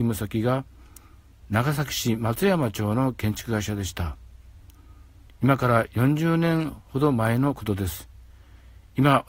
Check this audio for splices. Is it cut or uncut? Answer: uncut